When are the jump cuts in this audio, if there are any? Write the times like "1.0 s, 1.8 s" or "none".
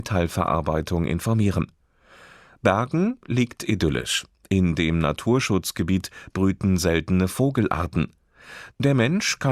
none